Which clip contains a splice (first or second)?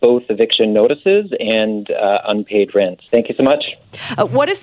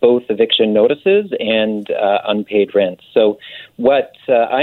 first